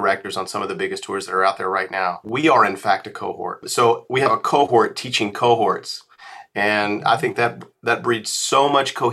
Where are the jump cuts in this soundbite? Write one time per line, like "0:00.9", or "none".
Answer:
0:02.2